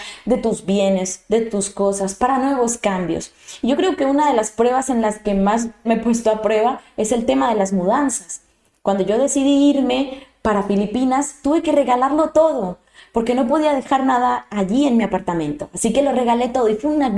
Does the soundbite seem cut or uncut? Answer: cut